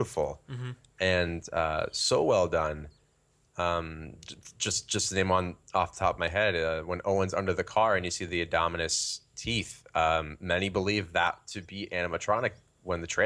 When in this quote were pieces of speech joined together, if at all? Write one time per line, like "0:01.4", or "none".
none